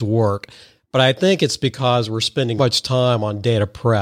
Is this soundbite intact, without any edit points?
no; 1 cut; at 2.6 s

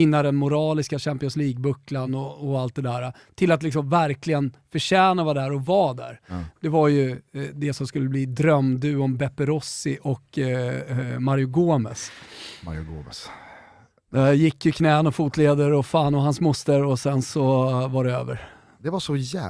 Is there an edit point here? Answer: no; 0 cuts

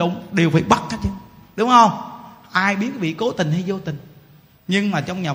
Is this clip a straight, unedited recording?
yes; 0 cuts

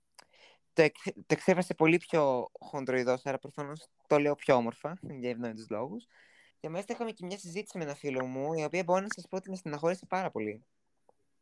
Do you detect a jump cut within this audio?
yes; 1 cut; at 6.5 s

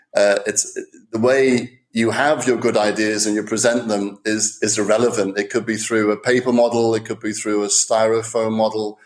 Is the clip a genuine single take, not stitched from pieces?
yes; 0 cuts

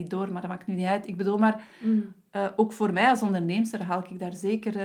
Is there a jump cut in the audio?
no; 0 cuts

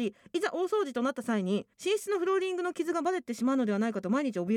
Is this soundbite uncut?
no; 1 cut; at 1.7 s

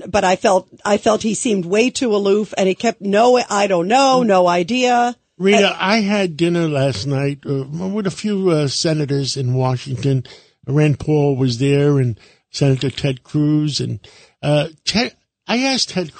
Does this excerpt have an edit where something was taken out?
no; 0 cuts

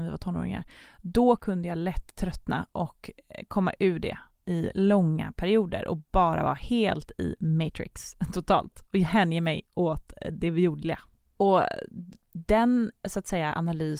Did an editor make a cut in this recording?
yes; 1 cut; at 11.2 s

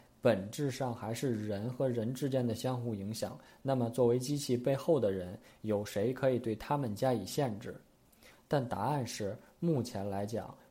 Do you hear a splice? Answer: no; 0 cuts

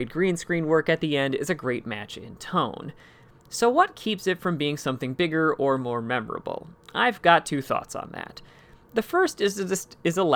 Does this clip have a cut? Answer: no; 0 cuts

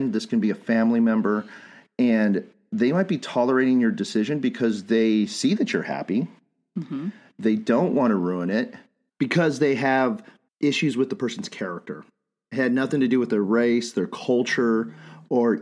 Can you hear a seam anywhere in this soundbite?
no; 0 cuts

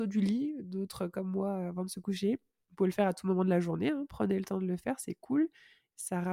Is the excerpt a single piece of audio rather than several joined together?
yes; 0 cuts

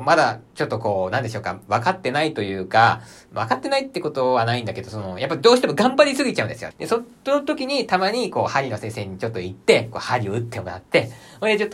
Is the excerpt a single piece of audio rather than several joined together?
no; 1 cut; at 6.7 s

